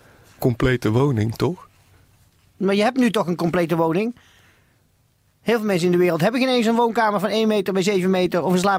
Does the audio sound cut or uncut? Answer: uncut